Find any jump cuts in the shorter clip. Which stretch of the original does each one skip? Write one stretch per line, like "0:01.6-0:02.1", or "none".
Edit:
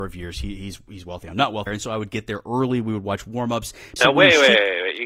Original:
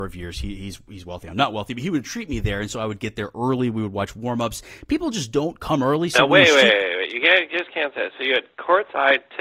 0:01.7-0:02.6
0:04.9-0:06.1